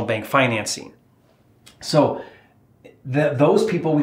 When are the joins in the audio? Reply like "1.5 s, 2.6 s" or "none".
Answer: none